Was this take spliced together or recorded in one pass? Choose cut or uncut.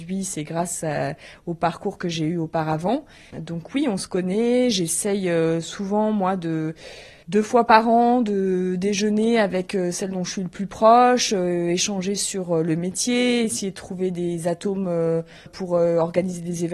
cut